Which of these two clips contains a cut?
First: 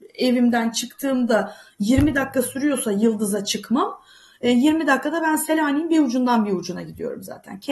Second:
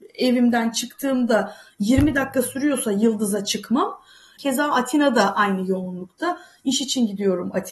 second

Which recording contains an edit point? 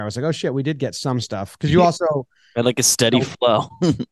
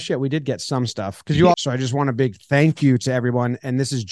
second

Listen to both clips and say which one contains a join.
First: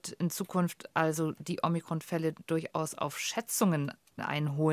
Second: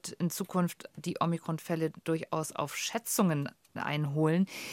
second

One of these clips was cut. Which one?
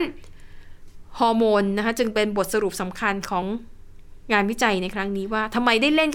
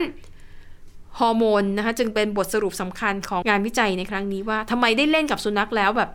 second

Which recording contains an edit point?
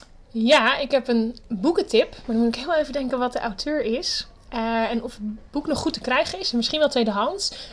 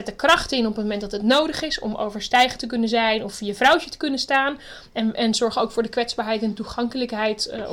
first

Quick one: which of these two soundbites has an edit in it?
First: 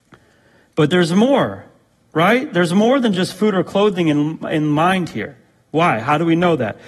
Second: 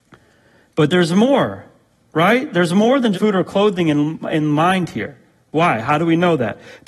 second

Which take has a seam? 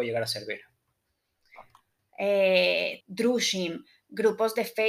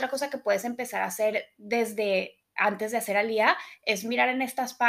first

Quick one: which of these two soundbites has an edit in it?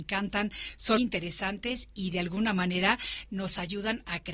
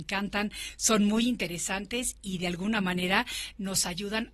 first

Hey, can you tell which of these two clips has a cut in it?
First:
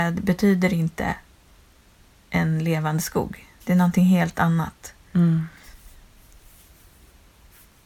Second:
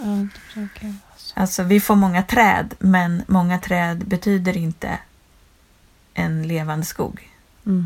first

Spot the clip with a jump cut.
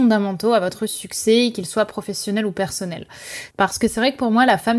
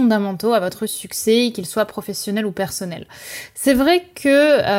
first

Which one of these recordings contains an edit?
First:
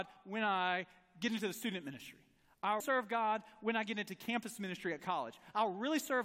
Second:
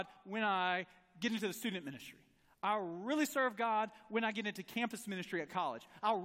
first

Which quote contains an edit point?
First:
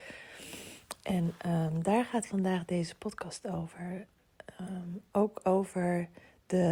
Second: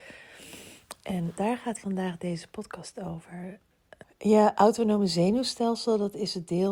second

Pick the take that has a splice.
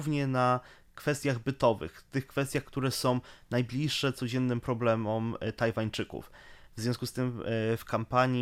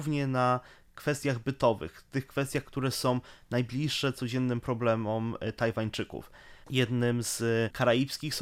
second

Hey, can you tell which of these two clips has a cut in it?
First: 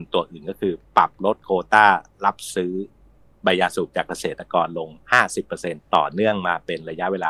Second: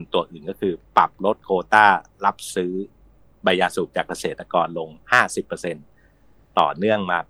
first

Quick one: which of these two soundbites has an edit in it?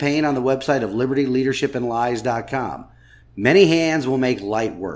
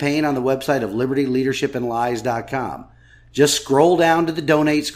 first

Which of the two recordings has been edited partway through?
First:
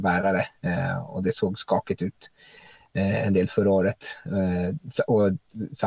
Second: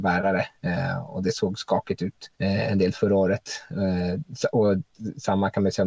second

